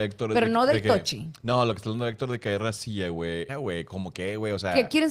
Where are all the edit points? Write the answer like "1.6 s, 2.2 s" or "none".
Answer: 3.5 s